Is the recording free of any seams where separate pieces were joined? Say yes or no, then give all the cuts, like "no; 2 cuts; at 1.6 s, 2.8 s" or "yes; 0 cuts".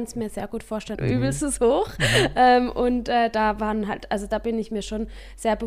no; 1 cut; at 0.9 s